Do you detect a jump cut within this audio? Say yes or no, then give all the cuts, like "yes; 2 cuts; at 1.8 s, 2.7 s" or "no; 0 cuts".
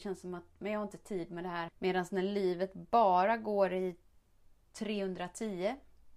yes; 1 cut; at 1.7 s